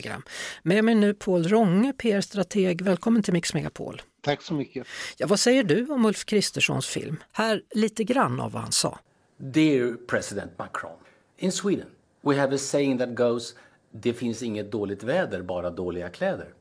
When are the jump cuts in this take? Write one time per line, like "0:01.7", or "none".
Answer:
0:07.3

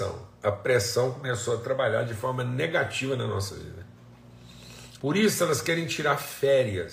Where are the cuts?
0:05.0

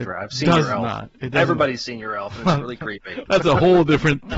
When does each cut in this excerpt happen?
0:03.3

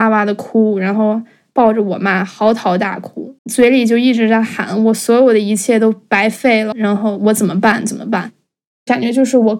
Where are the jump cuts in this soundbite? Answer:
0:03.4
0:06.7

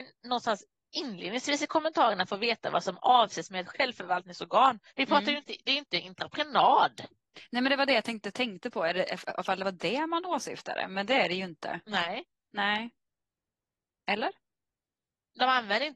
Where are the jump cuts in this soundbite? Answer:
0:04.9

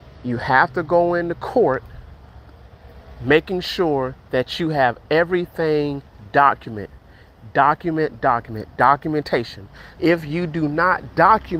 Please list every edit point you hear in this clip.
0:08.2
0:09.9

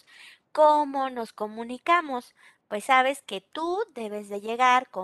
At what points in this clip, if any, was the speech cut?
0:02.5

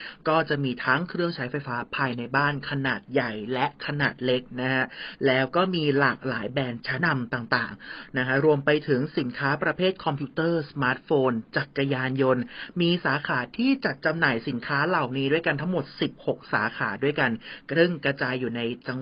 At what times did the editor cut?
0:07.0

